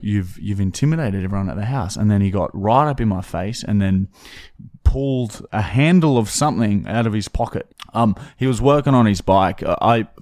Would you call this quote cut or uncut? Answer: cut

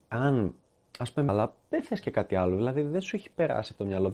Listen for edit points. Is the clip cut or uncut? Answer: cut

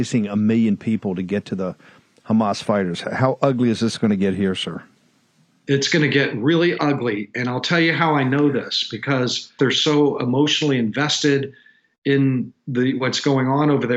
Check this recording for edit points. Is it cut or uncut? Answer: cut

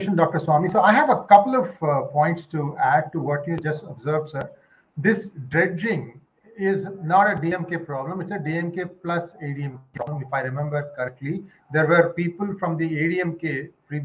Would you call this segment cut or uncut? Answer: uncut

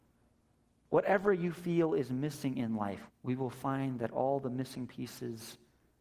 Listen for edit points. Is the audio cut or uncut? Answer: cut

